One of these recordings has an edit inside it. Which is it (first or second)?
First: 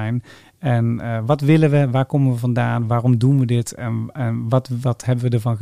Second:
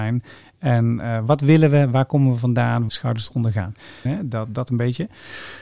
second